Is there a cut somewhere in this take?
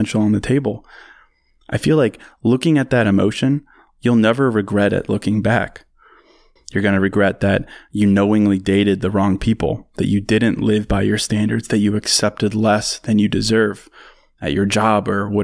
yes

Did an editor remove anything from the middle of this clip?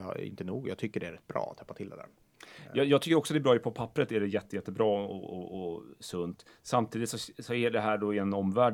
no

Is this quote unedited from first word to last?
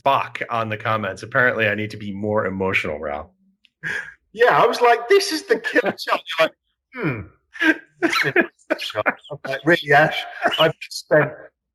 yes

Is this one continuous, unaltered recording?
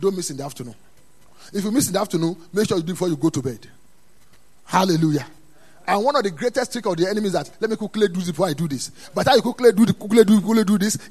yes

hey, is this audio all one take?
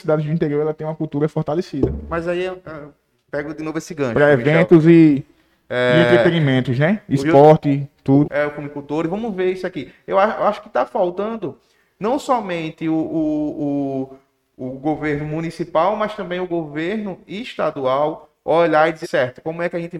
no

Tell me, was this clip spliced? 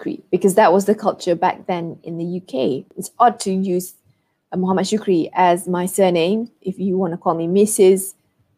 yes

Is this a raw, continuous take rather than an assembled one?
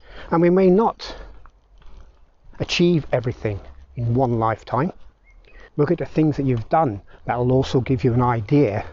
no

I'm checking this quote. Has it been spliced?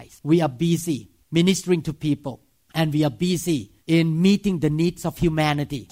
yes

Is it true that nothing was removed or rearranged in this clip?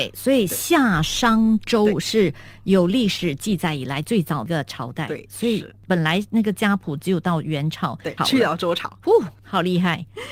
no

